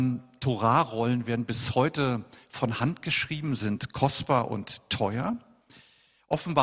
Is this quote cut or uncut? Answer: uncut